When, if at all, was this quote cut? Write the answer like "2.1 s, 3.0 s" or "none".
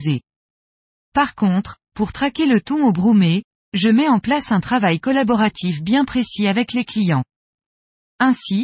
none